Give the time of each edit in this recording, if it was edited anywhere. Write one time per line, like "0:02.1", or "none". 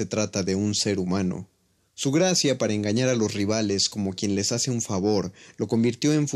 0:01.8